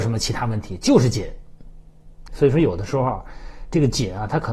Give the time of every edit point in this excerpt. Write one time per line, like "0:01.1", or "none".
0:02.3